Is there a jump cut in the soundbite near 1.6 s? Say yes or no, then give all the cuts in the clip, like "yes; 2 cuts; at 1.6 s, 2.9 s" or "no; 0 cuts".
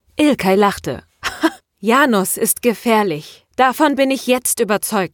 yes; 1 cut; at 1.6 s